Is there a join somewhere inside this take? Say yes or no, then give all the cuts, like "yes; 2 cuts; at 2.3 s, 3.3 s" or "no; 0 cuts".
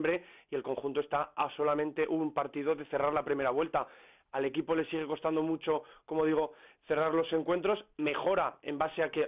no; 0 cuts